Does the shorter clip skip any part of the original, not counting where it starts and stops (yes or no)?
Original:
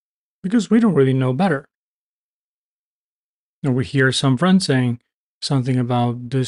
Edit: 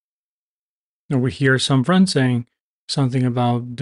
no